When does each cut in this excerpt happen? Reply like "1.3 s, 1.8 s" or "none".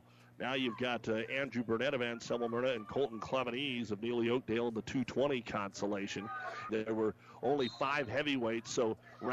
6.7 s

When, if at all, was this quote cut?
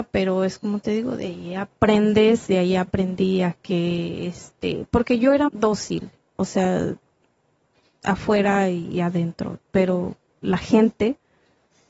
5.5 s

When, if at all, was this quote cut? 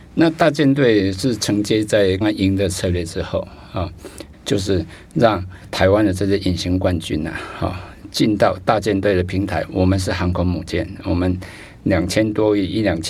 2.2 s, 4.3 s

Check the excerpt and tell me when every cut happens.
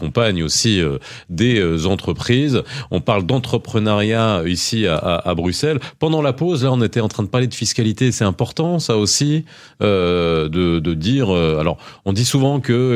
none

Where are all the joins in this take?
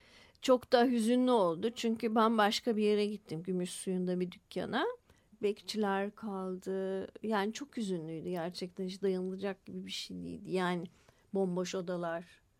5.3 s

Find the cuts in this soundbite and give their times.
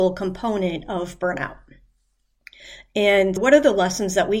3.4 s

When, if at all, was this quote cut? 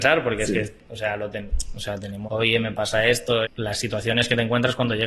2.3 s, 3.4 s

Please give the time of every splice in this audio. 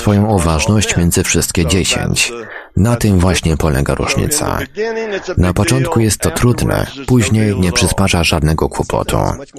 none

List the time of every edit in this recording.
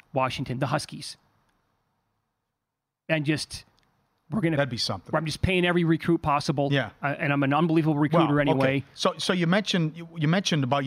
none

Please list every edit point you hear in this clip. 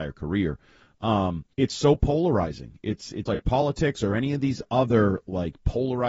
1.5 s, 3.3 s

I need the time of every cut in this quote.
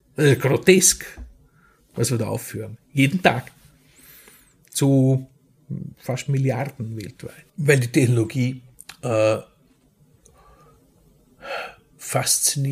7.5 s

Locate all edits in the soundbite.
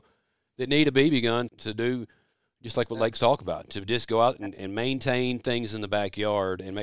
1.5 s

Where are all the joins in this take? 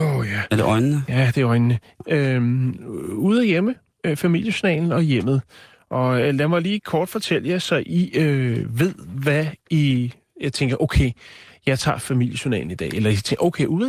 2.0 s

